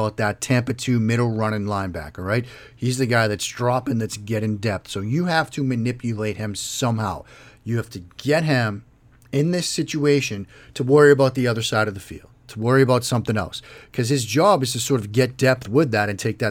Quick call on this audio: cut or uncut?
uncut